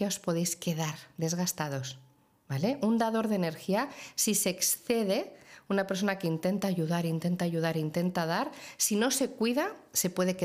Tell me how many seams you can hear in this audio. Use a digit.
0